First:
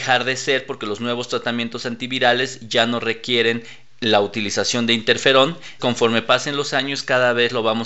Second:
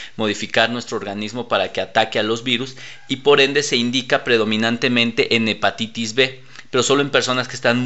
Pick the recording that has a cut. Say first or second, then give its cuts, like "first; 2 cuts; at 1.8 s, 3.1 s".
first; 1 cut; at 5.8 s